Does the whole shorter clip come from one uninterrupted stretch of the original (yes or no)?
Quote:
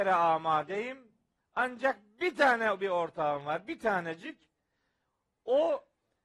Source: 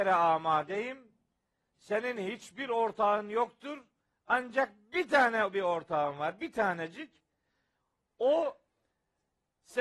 no